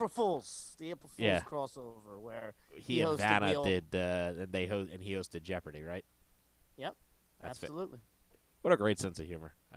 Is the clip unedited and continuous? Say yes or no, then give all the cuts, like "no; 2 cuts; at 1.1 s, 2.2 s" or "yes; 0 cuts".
yes; 0 cuts